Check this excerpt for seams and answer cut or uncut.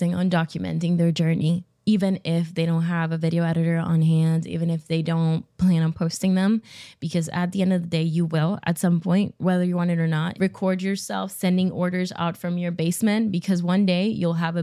cut